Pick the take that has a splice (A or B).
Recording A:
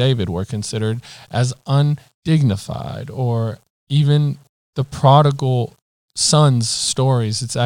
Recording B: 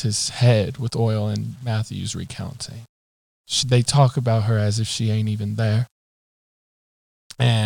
B